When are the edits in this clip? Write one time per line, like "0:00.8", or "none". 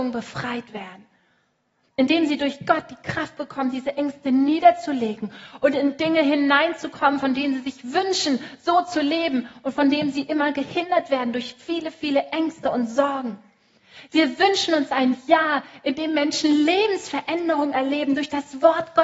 none